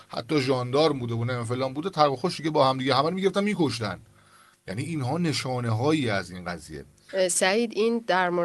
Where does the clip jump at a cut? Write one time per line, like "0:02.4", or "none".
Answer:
none

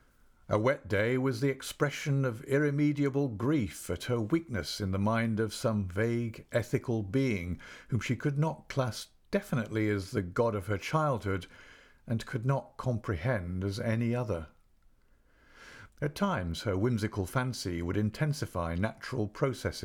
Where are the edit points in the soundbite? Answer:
0:15.9

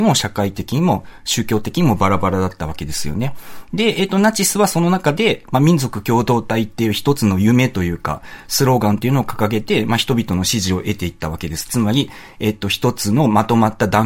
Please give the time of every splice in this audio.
none

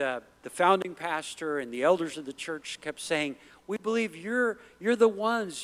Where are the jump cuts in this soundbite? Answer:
none

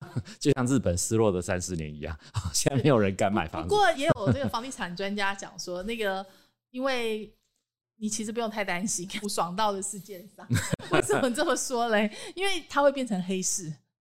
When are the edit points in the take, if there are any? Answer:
0:03.9
0:09.2

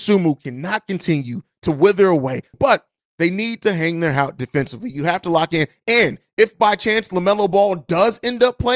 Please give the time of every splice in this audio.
0:02.5

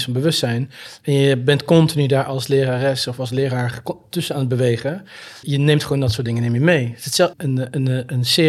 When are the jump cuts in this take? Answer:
0:05.4
0:07.3

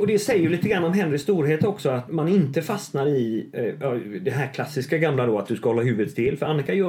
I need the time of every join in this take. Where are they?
0:02.1

